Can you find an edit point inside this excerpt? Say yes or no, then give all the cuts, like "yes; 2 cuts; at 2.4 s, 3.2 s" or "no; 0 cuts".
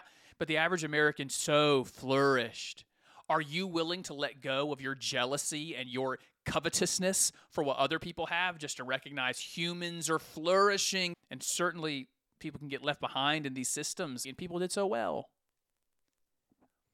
yes; 2 cuts; at 11.1 s, 14.2 s